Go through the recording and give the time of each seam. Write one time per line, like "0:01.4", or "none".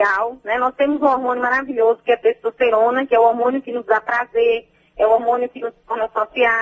none